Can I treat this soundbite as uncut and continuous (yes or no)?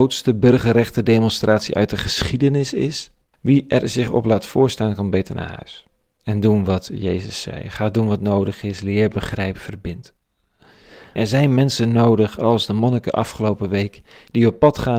no